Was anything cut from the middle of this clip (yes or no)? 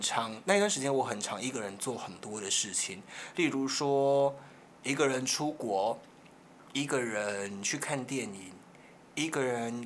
no